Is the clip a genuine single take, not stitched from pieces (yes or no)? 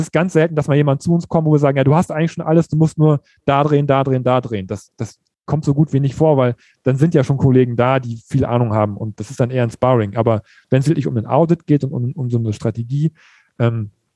yes